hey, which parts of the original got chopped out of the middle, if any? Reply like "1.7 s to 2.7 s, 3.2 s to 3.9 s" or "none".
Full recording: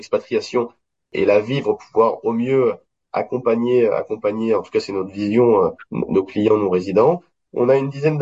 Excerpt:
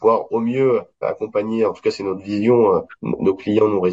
2.9 s to 3.9 s